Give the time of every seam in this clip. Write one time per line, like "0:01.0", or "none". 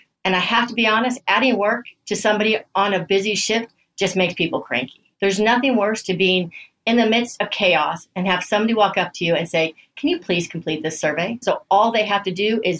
0:11.4